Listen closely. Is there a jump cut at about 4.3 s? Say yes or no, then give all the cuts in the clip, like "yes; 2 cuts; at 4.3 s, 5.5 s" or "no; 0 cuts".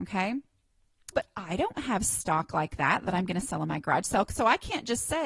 no; 1 cut; at 1.1 s